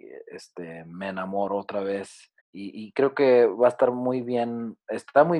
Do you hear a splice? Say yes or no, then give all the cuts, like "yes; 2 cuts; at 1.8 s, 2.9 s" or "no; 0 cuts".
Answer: yes; 1 cut; at 2.4 s